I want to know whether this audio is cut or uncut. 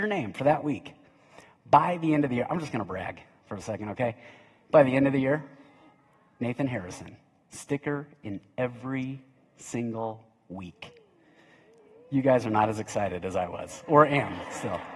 uncut